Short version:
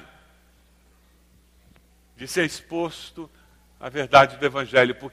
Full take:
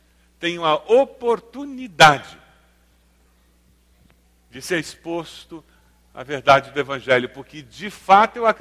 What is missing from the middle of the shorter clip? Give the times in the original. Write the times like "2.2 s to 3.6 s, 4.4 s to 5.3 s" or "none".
none

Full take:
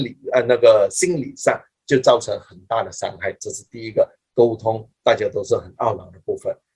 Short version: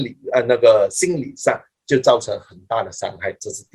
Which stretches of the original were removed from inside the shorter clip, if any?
none

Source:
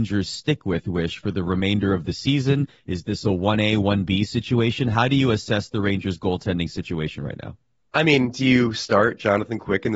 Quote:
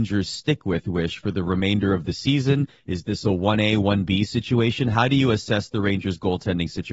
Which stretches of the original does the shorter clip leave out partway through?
none

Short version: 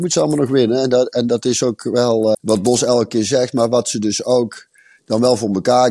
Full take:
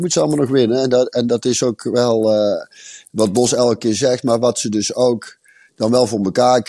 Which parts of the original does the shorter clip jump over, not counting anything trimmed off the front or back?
2.3 s to 3.0 s

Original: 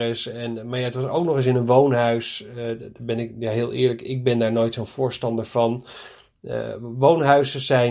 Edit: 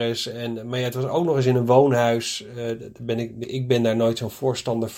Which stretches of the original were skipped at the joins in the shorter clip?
3.4 s to 4.0 s

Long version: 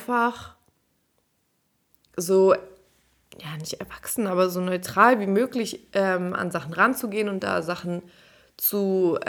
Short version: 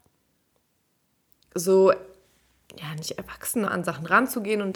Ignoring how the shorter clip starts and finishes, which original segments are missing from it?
4.3 s to 6.3 s

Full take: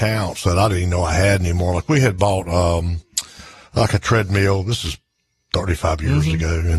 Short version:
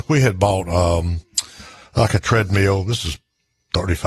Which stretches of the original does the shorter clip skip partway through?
none

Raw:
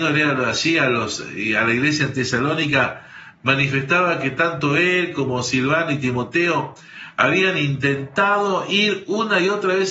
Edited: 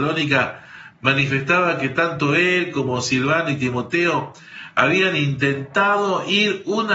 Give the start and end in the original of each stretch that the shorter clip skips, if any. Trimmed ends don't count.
none

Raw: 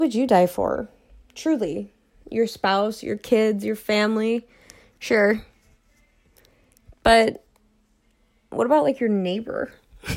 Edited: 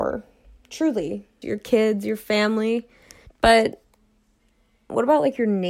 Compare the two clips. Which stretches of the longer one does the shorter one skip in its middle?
2.1 s to 3.0 s, 4.9 s to 6.9 s

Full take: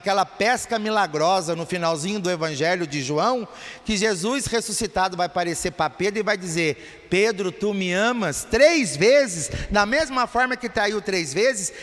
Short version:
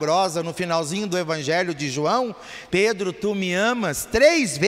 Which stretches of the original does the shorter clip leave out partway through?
3.8 s to 7.1 s

